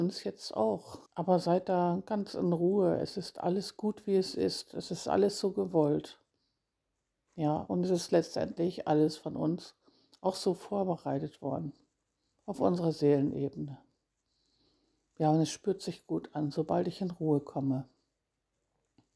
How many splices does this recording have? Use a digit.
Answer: 1